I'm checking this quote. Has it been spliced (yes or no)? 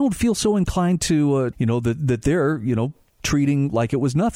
yes